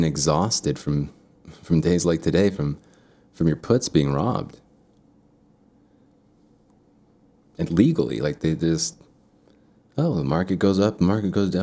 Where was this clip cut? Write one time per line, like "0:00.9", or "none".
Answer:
none